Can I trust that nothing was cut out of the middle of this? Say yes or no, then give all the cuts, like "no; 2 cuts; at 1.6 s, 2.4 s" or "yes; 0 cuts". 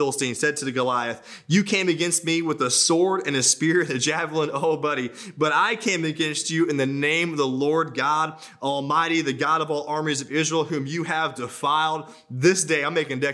yes; 0 cuts